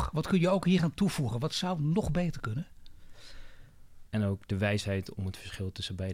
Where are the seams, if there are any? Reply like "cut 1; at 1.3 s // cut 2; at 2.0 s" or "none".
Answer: cut 1; at 4.1 s

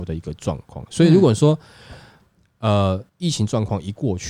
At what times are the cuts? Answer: cut 1; at 3.1 s

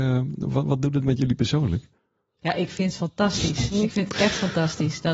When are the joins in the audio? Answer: none

